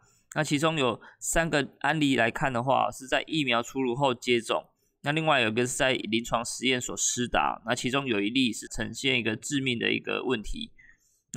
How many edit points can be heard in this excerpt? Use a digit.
1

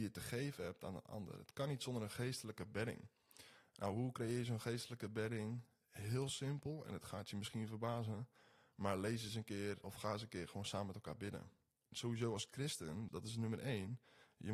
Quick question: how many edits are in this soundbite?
3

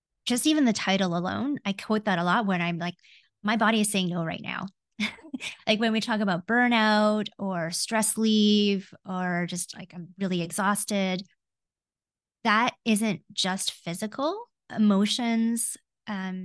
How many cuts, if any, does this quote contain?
0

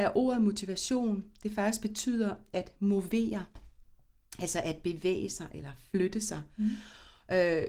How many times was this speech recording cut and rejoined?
0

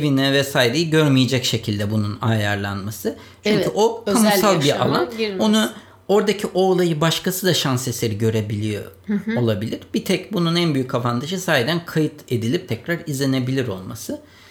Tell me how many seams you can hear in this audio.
1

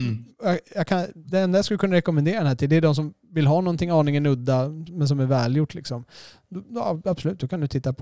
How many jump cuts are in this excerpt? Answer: 0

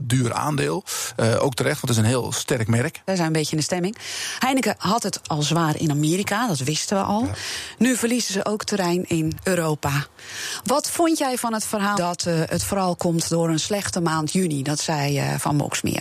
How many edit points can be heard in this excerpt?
2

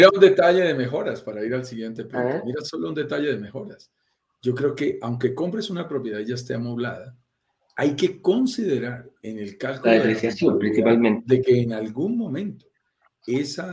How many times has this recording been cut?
1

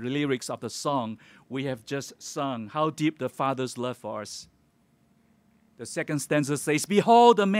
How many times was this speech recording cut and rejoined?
0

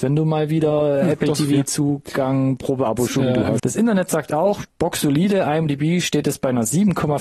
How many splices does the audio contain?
2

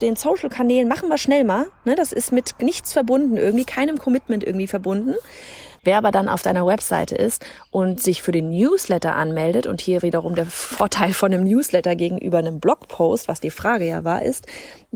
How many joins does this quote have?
1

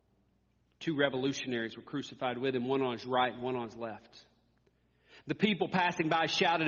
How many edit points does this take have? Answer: 0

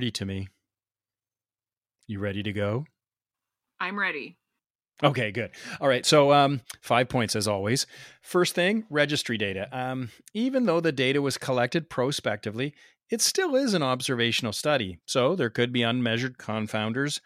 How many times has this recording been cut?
0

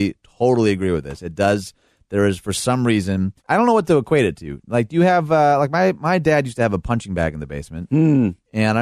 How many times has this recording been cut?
1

